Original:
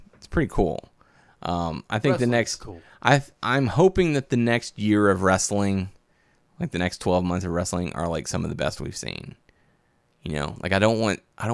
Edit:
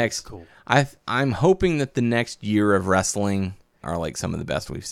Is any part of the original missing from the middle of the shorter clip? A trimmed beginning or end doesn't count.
yes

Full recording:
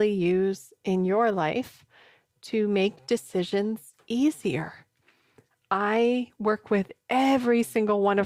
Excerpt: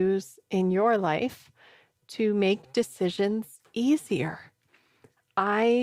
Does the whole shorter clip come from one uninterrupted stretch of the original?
yes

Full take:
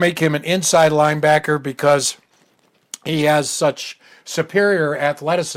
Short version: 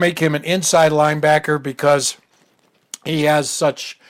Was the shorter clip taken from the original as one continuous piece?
yes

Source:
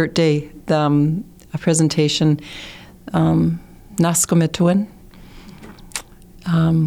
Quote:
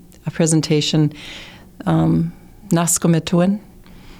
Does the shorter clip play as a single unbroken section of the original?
yes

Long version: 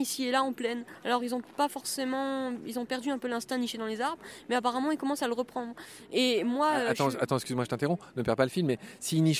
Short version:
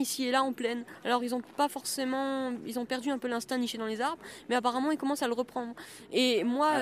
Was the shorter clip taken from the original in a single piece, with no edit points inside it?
yes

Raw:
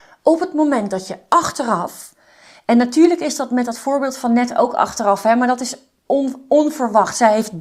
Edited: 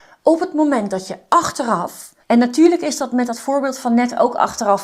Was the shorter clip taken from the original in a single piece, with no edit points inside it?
no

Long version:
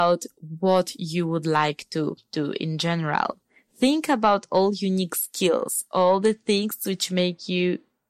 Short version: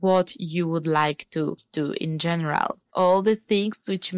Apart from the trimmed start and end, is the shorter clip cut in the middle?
yes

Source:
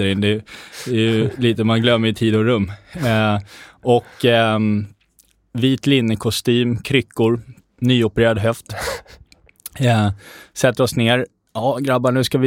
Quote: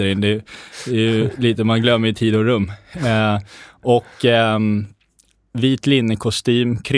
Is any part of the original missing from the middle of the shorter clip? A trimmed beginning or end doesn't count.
no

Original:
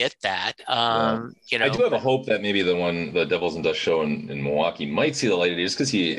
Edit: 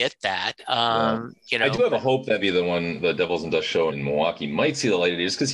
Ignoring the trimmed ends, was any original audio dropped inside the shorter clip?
yes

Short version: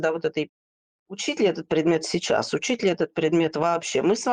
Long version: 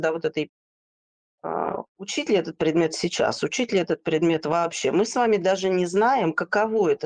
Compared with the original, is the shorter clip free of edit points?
no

